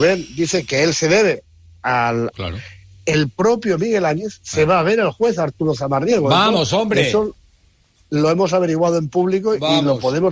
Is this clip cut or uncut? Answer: cut